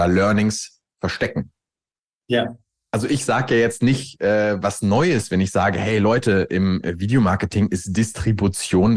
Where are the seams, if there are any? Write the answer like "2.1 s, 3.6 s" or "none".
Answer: none

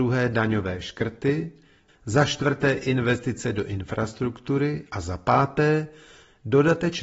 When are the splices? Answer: 1.9 s

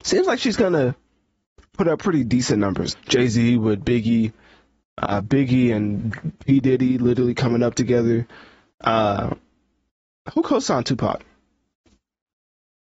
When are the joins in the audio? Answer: 2.9 s

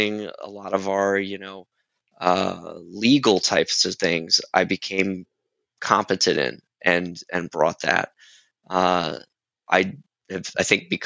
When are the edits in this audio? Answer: none

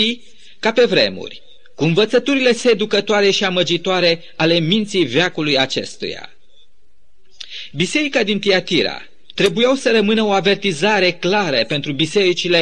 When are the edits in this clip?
7.7 s, 9.4 s

